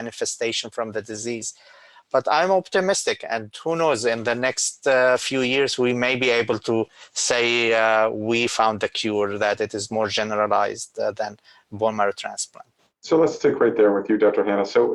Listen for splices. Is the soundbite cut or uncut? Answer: uncut